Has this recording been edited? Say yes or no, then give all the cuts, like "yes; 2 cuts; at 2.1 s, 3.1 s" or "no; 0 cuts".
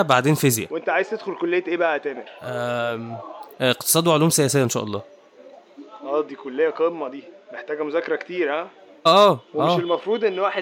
yes; 2 cuts; at 3.5 s, 9.1 s